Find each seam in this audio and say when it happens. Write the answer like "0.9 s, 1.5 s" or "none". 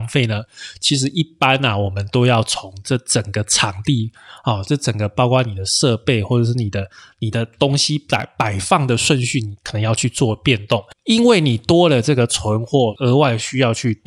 10.9 s, 12.9 s